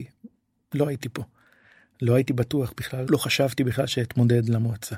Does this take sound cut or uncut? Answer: cut